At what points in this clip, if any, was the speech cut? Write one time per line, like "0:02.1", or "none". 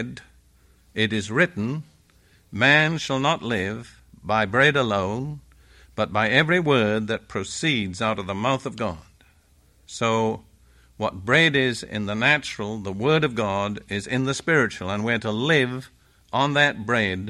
none